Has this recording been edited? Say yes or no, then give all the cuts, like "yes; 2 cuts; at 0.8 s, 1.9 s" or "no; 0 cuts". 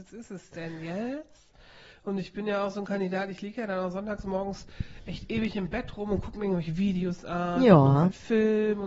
no; 0 cuts